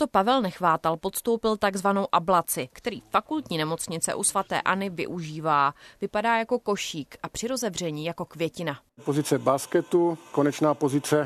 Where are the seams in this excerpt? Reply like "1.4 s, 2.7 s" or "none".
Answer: 2.7 s

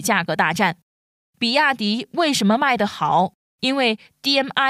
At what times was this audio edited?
1.2 s

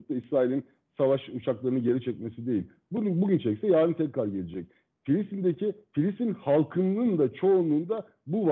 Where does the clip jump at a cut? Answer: none

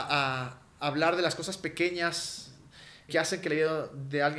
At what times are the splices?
3.1 s

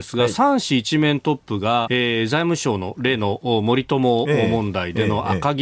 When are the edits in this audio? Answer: 1.9 s

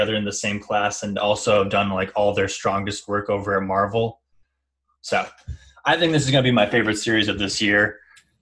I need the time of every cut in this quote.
4.9 s

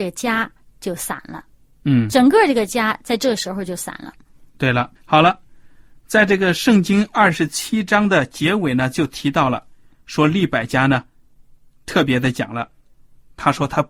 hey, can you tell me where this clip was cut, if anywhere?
4.9 s

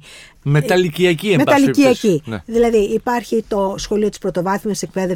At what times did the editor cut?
none

